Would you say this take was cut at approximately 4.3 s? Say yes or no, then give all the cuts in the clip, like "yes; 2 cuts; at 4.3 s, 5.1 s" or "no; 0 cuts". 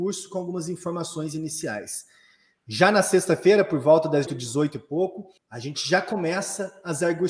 yes; 2 cuts; at 4.3 s, 5.4 s